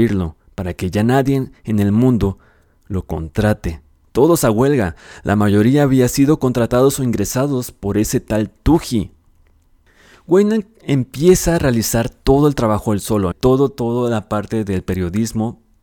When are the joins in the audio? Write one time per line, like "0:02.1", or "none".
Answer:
0:04.0
0:13.3